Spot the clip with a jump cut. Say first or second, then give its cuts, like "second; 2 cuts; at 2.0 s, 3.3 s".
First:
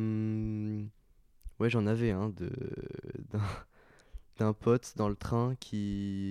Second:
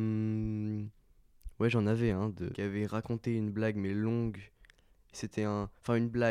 second; 1 cut; at 2.5 s